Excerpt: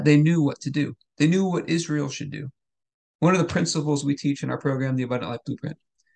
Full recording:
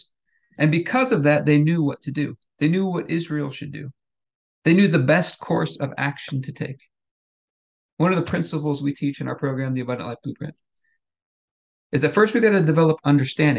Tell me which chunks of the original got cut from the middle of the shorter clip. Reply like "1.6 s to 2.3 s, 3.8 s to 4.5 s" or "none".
4.5 s to 7.9 s